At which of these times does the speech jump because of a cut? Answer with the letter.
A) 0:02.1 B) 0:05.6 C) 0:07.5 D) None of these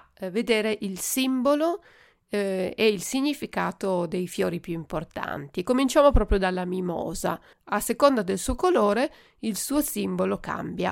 C